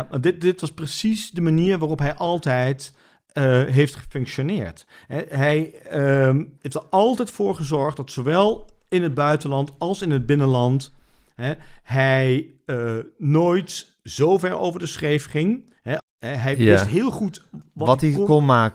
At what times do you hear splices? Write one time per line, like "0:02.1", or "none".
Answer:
0:06.6
0:16.0